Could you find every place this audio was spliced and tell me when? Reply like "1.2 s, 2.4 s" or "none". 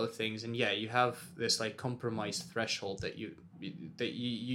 none

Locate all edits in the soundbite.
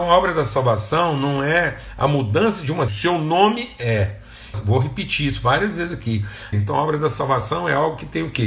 2.9 s, 4.5 s, 6.5 s

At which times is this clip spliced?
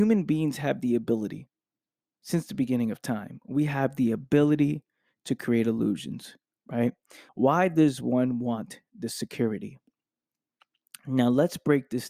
7.3 s

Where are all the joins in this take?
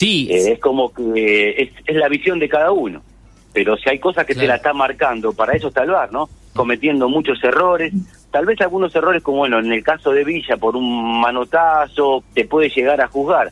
6.6 s, 12.2 s

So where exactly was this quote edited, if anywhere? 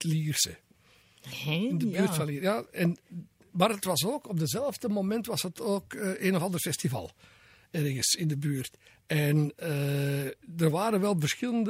none

